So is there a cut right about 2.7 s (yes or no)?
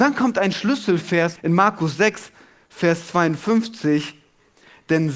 no